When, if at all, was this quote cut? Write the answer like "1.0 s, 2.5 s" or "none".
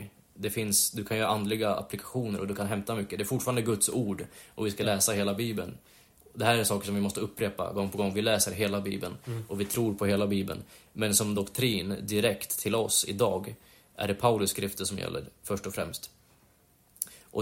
none